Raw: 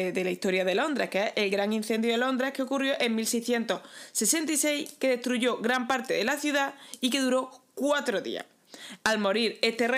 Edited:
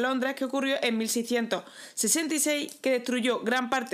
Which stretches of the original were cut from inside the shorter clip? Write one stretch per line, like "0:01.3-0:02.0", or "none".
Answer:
none